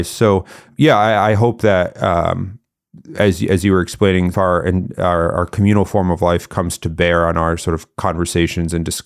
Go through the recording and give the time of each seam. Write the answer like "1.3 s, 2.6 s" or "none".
4.3 s